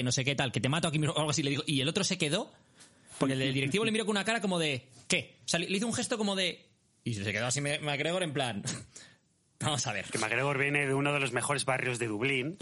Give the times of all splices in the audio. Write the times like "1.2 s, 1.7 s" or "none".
none